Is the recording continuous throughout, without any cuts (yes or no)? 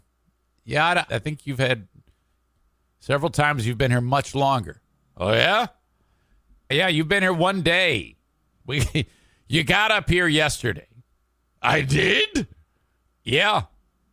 no